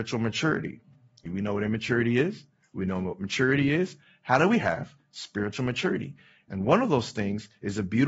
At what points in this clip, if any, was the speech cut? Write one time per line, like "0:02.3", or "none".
0:01.3